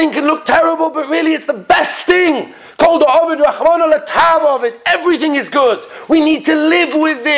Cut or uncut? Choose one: uncut